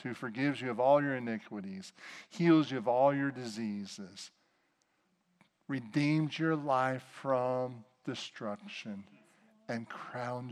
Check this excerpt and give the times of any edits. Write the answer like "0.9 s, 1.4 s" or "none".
none